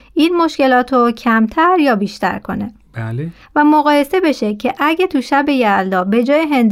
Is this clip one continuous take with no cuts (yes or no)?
no